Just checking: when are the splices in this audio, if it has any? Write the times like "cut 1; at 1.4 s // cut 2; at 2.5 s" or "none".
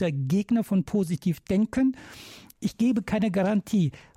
none